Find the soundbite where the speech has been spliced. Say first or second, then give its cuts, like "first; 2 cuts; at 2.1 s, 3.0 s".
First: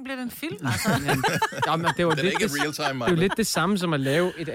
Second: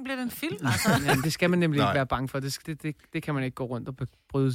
second; 2 cuts; at 1.2 s, 2.6 s